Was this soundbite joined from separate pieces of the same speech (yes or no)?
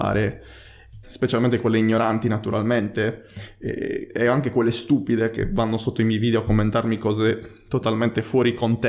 yes